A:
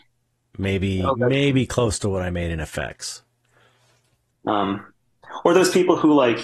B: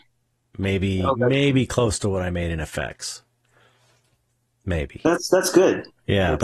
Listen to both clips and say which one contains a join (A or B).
A